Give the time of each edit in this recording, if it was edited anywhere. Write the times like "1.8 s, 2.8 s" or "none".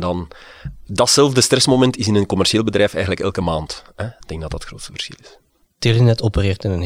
4.2 s

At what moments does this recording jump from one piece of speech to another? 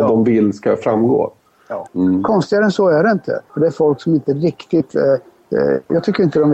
1.9 s, 3.5 s

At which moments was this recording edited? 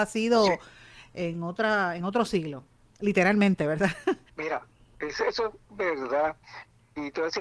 4.3 s

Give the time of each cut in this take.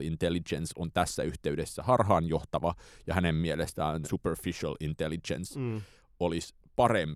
4.0 s

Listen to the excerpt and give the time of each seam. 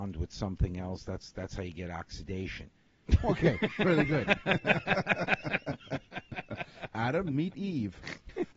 3.0 s

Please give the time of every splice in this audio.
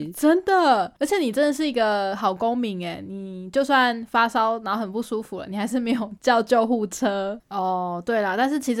7.4 s

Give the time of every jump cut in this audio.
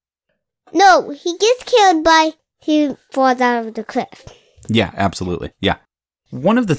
none

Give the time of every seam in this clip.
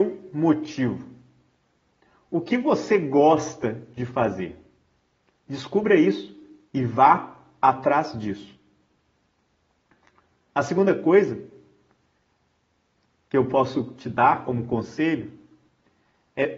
none

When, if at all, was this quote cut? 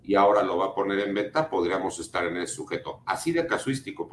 none

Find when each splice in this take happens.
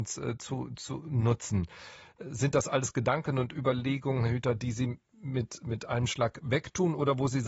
none

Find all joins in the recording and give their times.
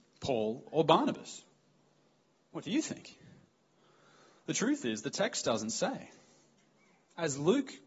none

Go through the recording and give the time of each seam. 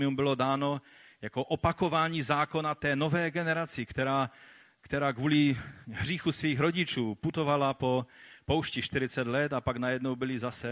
none

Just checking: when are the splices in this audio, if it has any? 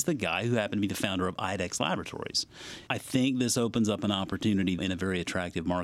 2.9 s, 4.8 s

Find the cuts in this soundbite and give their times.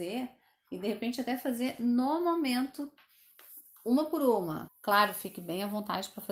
4.7 s

